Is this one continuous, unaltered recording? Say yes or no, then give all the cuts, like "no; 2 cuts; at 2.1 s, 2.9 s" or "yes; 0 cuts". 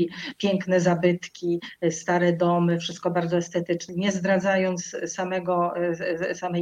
no; 1 cut; at 3.9 s